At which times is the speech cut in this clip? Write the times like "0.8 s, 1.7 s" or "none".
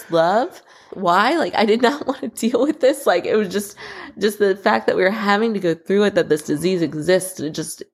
0.9 s